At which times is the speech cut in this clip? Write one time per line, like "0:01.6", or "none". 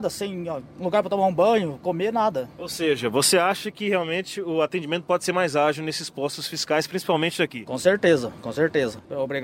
none